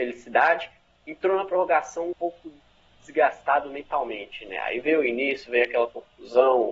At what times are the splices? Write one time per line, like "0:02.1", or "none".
0:02.1